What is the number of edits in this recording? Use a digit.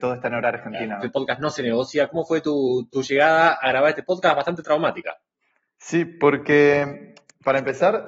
1